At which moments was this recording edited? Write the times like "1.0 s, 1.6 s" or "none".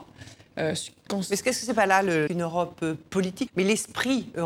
2.3 s, 3.5 s